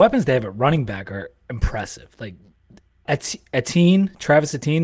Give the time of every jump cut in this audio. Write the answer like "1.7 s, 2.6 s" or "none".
3.1 s